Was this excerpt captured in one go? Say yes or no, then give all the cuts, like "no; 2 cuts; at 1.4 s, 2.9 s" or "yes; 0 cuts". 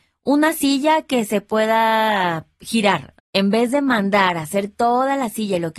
no; 1 cut; at 3.2 s